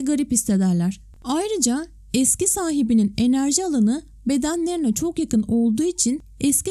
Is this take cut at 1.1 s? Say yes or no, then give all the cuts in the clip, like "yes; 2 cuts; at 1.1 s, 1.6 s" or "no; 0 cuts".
yes; 1 cut; at 1.1 s